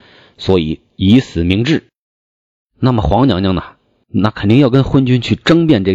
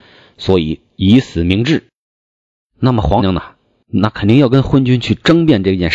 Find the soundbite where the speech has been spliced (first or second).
second